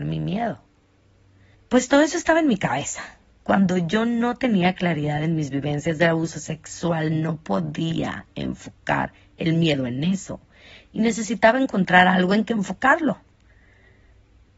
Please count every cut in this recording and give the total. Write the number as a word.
one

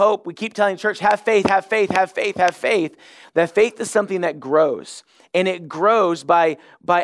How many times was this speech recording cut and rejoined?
one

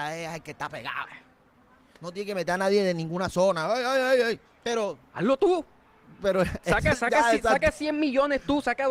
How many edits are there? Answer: one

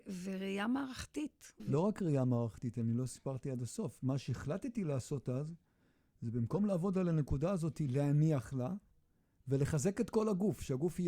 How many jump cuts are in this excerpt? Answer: one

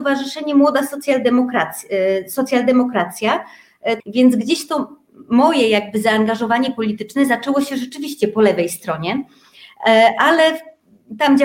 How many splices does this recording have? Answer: one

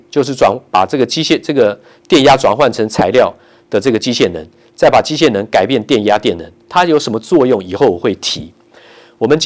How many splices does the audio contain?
one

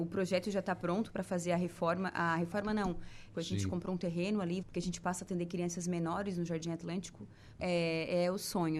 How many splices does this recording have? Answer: three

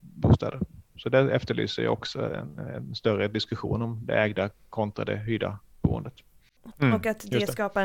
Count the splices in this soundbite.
one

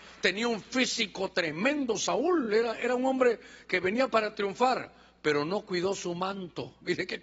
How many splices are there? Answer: zero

